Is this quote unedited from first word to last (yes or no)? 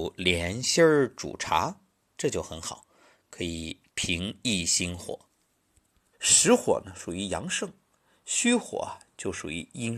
no